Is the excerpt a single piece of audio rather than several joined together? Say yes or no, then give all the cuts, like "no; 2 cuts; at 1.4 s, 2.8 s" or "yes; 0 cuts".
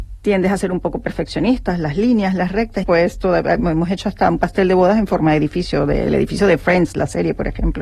no; 1 cut; at 2.8 s